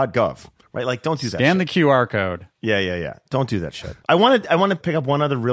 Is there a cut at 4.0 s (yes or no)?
yes